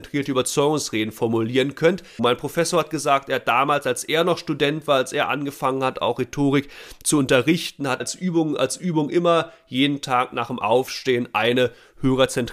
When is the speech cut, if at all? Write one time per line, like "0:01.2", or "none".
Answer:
0:02.2
0:08.0